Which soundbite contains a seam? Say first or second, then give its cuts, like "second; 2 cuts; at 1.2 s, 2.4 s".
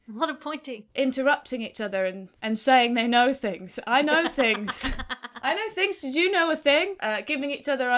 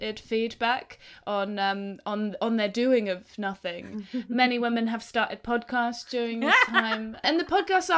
first; 1 cut; at 2.4 s